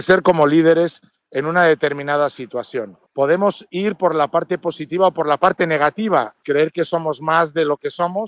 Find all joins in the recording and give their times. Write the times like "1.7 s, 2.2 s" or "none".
3.1 s, 6.4 s